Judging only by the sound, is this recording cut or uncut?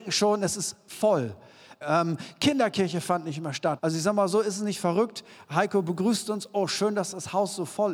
cut